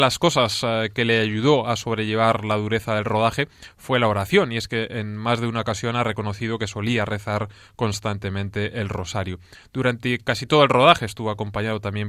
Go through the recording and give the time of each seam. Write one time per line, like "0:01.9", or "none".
none